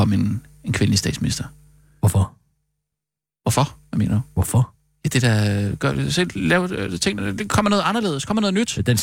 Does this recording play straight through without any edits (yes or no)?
yes